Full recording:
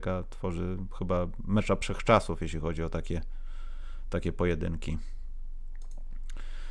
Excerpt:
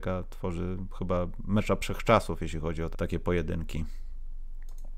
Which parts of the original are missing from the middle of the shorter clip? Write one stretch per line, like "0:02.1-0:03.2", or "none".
0:02.9-0:04.0